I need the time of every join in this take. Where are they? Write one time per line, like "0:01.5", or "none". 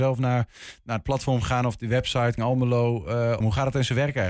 0:02.4
0:03.4